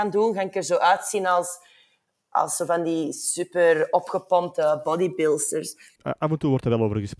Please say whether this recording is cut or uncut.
cut